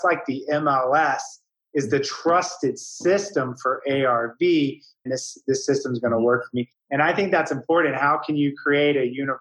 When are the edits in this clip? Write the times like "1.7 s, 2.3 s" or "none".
5.1 s

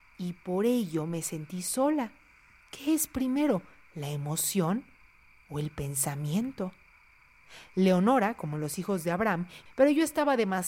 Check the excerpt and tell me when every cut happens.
9.7 s

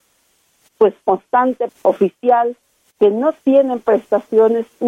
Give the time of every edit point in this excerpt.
1.7 s

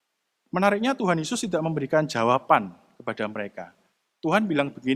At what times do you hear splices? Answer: none

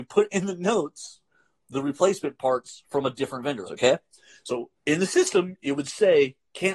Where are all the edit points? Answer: 3.7 s, 4.7 s

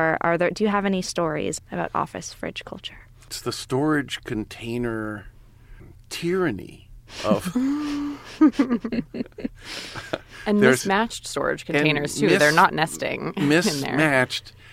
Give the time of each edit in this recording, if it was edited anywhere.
1.6 s

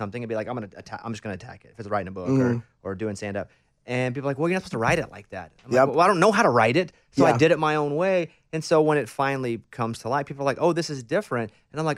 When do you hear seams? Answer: none

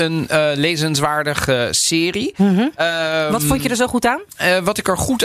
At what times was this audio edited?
none

